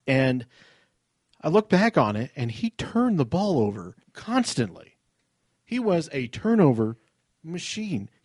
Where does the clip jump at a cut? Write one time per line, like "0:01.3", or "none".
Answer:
0:04.0